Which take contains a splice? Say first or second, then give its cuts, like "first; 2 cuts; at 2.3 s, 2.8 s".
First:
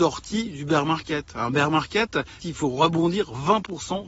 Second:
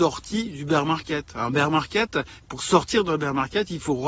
first; 1 cut; at 2.4 s